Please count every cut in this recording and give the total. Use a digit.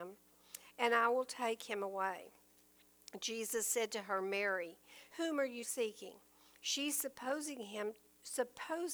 1